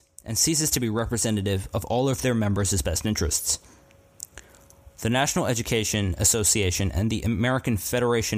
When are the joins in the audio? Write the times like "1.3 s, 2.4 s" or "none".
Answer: 4.9 s